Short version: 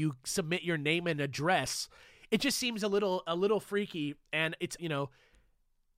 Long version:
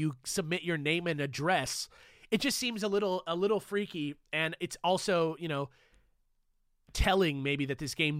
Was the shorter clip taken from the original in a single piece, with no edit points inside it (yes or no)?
no